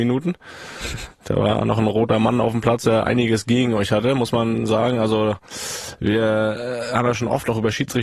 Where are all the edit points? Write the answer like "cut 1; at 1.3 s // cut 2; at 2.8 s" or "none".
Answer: none